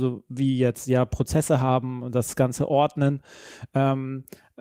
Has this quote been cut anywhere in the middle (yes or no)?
no